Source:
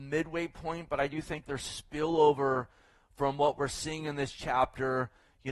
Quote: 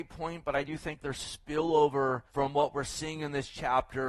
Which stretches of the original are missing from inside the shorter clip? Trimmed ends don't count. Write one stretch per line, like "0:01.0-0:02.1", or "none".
0:02.7-0:03.1